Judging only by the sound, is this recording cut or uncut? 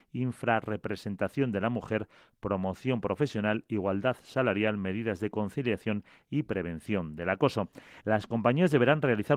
cut